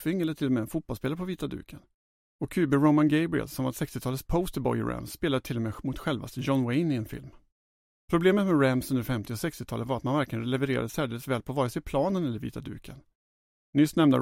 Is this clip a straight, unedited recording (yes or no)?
yes